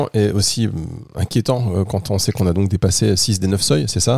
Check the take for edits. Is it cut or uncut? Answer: uncut